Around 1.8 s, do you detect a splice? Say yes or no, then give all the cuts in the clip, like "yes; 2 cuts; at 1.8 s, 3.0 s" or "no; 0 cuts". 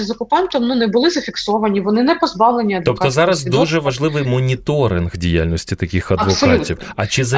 no; 0 cuts